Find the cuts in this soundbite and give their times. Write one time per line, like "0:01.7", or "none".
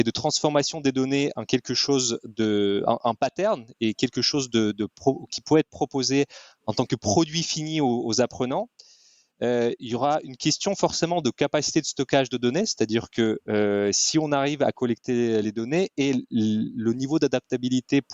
none